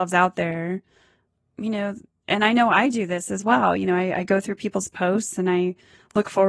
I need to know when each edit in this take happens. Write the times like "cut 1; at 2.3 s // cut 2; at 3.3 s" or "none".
none